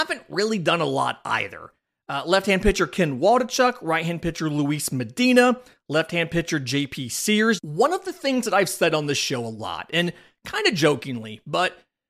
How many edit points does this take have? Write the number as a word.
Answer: one